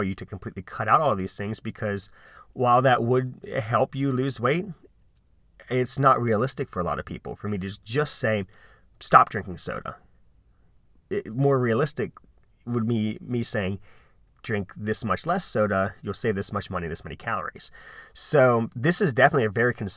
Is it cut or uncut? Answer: uncut